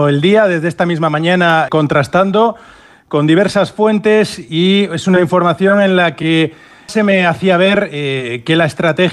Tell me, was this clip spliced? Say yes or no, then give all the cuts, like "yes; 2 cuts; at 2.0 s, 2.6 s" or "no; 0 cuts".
yes; 2 cuts; at 1.7 s, 6.9 s